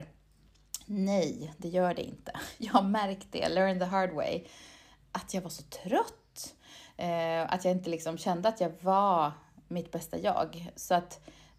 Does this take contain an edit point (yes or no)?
no